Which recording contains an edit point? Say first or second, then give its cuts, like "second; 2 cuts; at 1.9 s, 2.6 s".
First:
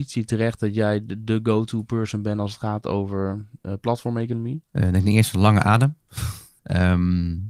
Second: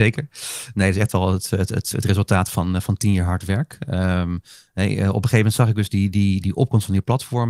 first; 2 cuts; at 4.6 s, 6.6 s